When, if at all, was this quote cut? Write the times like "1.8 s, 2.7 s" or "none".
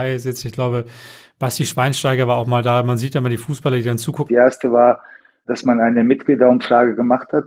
4.3 s